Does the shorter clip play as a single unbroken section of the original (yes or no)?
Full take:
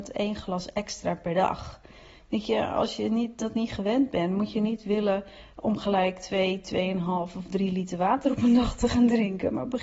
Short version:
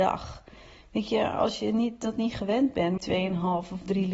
no